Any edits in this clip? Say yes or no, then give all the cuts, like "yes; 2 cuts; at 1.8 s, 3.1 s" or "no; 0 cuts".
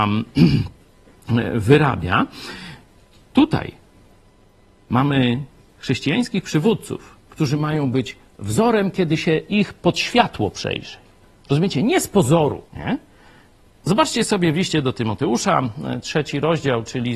yes; 1 cut; at 12.7 s